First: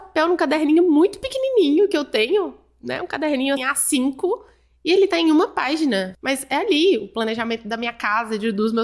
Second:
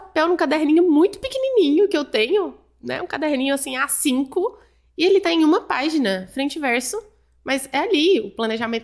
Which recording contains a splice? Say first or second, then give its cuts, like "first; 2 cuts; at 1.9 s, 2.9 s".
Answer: first; 2 cuts; at 3.6 s, 6.1 s